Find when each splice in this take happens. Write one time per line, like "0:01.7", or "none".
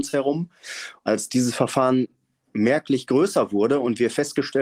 none